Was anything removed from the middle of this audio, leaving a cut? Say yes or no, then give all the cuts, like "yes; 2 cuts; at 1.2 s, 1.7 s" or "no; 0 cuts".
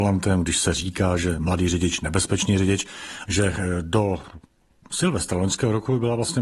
yes; 1 cut; at 3.2 s